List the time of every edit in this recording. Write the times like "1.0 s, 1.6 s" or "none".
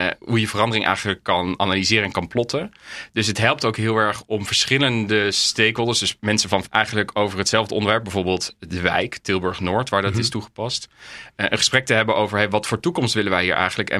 6.7 s